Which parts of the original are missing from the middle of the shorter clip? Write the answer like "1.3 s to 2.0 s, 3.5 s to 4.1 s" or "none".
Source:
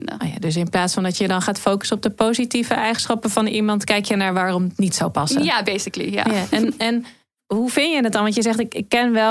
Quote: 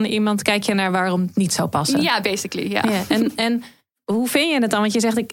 none